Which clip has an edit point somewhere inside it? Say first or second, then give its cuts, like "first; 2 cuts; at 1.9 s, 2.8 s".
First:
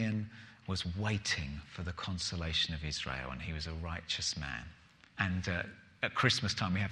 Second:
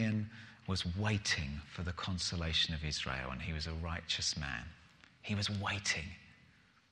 first; 1 cut; at 5.1 s